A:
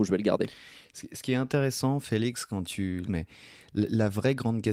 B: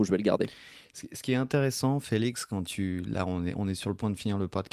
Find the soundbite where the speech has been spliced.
A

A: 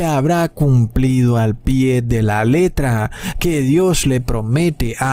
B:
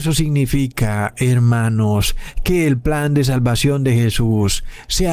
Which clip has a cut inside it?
A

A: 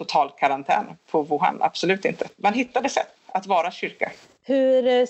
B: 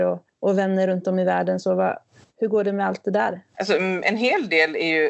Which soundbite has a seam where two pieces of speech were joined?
B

